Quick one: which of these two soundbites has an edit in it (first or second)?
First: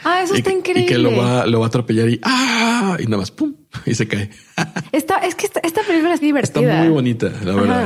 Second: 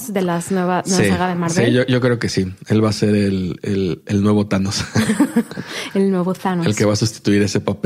first